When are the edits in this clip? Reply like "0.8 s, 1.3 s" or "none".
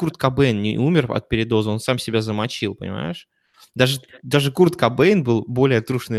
none